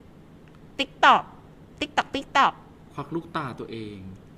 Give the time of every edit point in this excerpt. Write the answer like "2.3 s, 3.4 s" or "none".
none